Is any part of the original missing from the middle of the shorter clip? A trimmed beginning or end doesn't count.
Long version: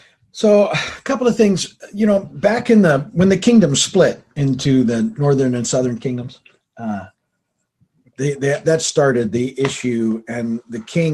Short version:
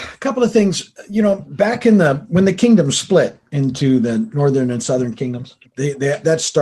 yes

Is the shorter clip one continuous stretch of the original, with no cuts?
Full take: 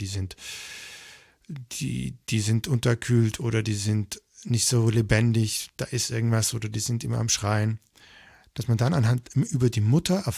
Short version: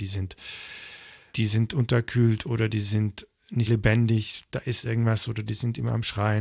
no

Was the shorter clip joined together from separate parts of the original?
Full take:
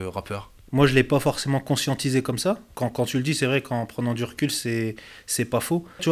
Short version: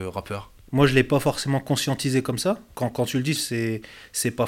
yes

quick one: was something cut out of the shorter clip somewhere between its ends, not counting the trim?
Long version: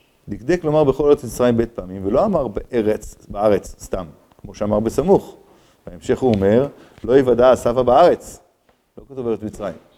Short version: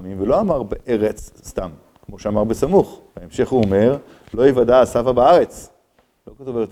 yes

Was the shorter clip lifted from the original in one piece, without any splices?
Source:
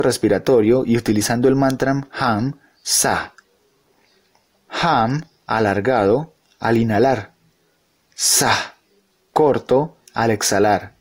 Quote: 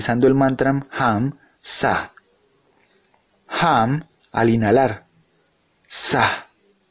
no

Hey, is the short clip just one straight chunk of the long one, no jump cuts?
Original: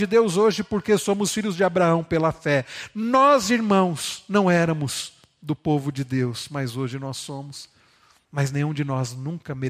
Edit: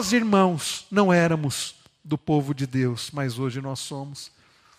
yes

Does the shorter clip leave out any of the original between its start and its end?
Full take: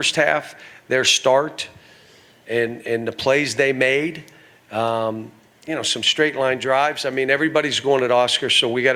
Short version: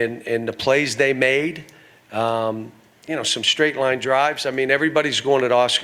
no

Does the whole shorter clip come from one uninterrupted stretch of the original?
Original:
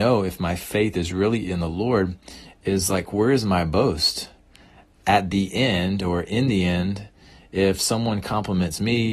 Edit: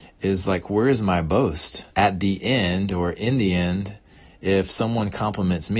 no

